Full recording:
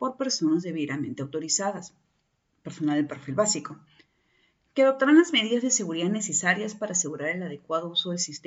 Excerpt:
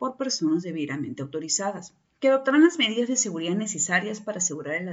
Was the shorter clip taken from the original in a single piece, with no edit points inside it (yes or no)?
no